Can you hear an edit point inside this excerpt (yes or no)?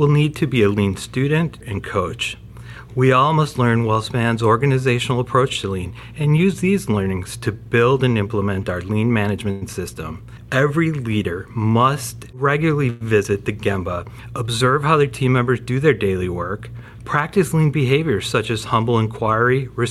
yes